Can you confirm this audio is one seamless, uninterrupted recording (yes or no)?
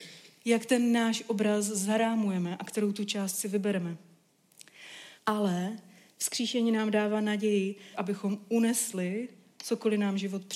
no